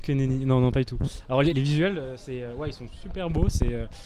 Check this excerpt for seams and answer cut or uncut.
cut